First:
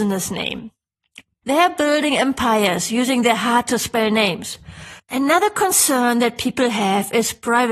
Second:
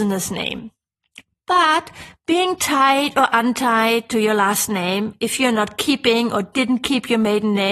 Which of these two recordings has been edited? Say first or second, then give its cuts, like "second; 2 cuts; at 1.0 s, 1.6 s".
first; 2 cuts; at 1.4 s, 5.0 s